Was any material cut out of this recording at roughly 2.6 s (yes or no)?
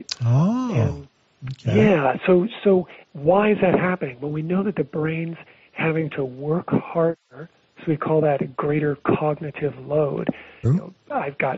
no